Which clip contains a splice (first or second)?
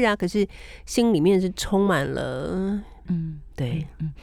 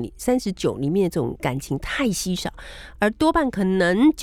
first